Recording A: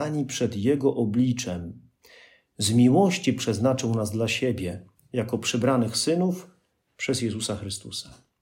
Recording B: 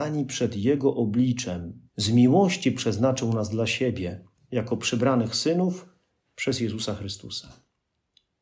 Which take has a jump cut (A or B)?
B